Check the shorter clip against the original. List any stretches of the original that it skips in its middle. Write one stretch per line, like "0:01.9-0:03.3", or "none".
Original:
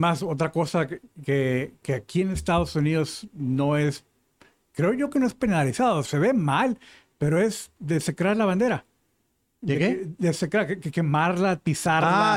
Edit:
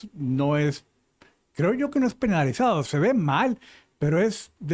none